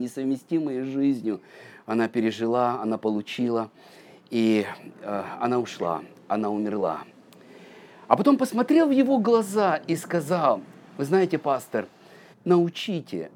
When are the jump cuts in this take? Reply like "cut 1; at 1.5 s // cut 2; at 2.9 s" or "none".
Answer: cut 1; at 12.3 s